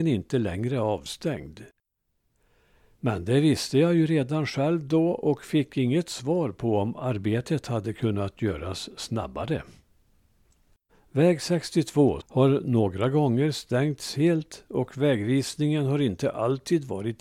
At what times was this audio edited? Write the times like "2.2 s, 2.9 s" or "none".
10.9 s, 12.2 s